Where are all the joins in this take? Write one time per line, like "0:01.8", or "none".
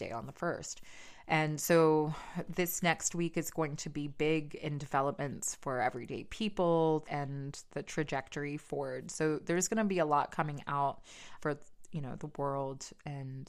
0:07.0
0:11.4